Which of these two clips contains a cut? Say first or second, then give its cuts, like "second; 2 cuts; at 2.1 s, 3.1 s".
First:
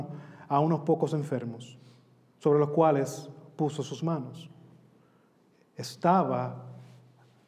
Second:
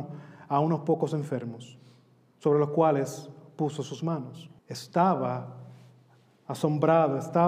second; 1 cut; at 4.6 s